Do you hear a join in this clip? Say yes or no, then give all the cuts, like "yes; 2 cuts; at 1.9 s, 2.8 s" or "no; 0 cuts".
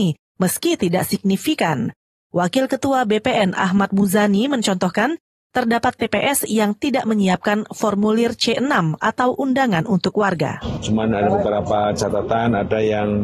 no; 0 cuts